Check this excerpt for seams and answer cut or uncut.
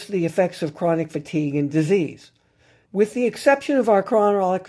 cut